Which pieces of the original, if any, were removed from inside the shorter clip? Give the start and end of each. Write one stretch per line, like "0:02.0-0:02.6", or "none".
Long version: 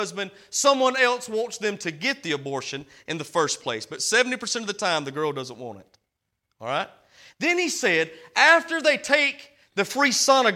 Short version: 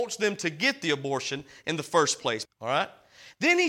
0:03.9-0:06.4